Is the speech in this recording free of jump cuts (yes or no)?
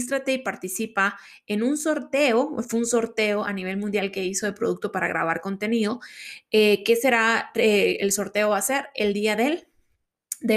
yes